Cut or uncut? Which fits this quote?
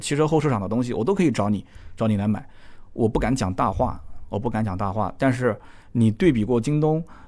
uncut